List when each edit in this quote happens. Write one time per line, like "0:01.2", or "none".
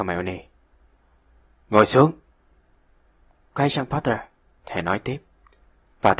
none